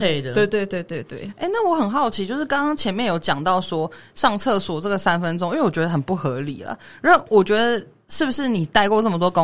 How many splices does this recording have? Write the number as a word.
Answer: zero